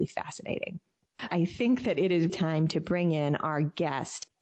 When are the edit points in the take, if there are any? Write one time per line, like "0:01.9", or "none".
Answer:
0:01.3
0:02.3